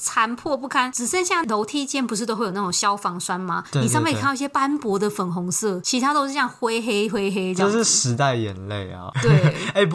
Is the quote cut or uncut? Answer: uncut